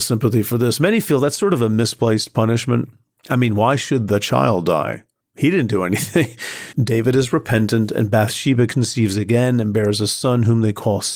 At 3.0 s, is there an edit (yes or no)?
no